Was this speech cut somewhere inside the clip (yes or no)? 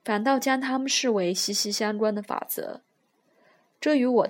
no